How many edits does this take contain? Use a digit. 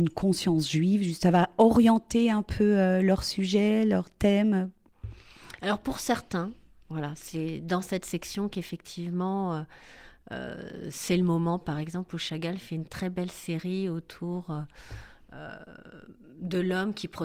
0